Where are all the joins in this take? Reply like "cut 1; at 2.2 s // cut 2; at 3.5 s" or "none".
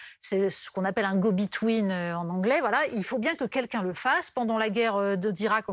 none